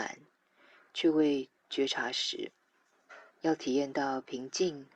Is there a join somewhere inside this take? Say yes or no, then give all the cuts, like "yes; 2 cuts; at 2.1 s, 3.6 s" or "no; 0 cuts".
yes; 1 cut; at 3.3 s